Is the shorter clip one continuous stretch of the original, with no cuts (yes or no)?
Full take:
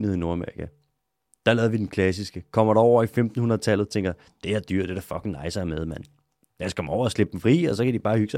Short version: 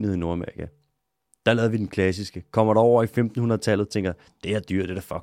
yes